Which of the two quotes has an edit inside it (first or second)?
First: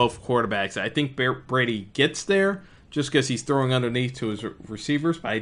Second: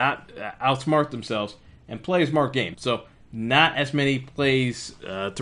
second